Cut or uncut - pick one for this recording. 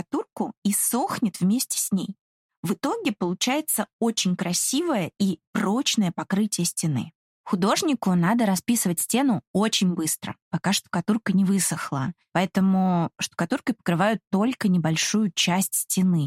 uncut